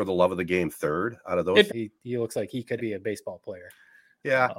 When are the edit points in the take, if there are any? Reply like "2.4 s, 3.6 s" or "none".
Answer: 1.7 s, 2.8 s